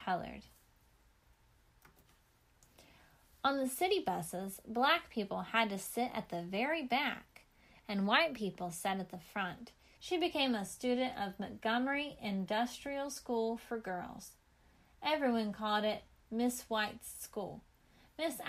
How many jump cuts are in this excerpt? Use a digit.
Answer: 1